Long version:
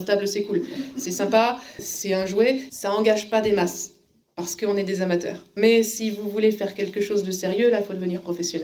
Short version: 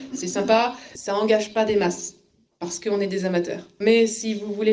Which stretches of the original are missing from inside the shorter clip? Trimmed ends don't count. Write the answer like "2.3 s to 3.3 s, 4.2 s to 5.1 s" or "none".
1.8 s to 2.7 s